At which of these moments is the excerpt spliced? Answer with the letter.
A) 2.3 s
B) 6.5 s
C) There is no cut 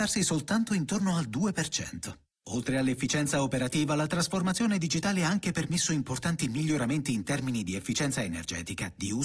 A